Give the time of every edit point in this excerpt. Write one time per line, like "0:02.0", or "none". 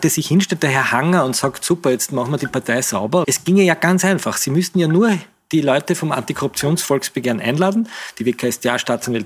0:03.2